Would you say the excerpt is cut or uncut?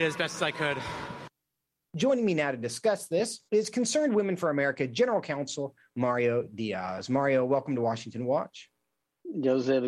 cut